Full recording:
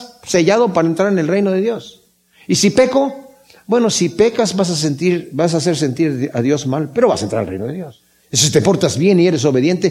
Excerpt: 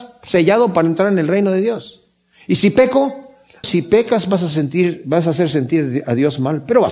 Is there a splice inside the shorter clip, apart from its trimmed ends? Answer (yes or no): yes